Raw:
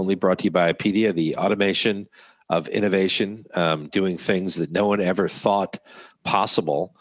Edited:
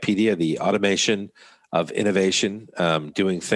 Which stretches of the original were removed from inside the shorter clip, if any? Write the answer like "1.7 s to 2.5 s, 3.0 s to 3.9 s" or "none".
none

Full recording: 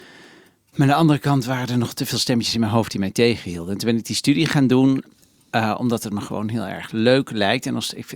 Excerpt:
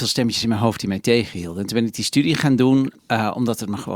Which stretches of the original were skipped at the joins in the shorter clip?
5.1 s to 5.4 s

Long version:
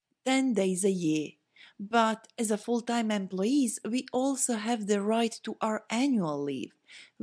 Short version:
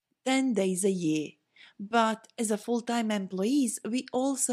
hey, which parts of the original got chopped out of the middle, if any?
none

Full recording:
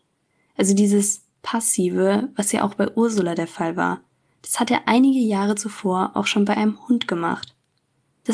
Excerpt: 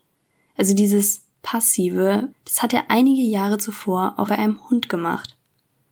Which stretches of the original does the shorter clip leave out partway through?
2.3 s to 4.3 s, 6.2 s to 6.4 s

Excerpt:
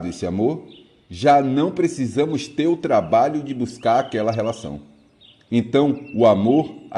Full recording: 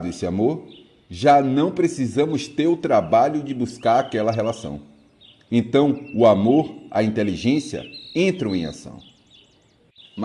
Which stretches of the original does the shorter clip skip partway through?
none

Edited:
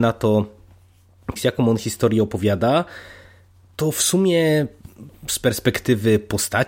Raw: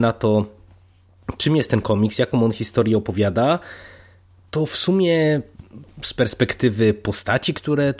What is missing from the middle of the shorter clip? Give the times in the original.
1.4 s to 2.1 s

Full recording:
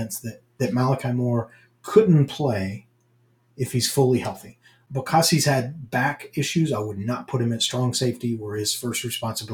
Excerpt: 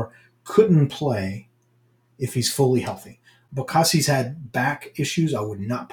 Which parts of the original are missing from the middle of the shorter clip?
none

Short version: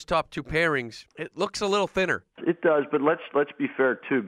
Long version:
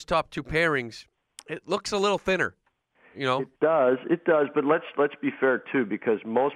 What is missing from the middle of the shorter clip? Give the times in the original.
1.1 s to 1.4 s, 2.7 s to 4.0 s

